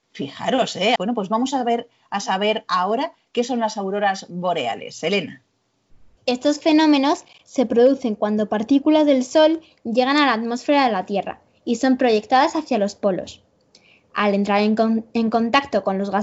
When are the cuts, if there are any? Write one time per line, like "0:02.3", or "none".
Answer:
0:01.0